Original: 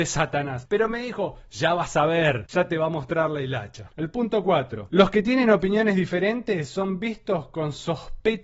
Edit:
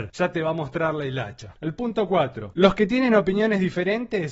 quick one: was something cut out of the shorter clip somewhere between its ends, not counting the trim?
no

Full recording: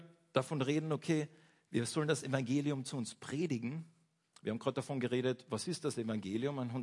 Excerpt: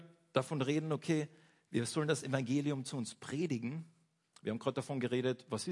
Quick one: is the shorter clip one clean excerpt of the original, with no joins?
yes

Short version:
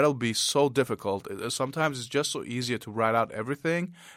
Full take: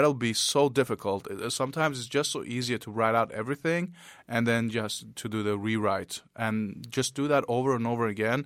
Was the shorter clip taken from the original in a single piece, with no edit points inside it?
yes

